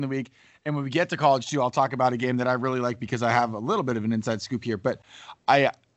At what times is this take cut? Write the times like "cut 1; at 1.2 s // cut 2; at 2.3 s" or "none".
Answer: none